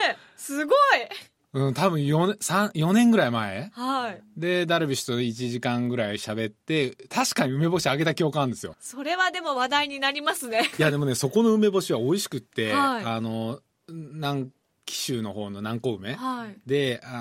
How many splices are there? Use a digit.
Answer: 1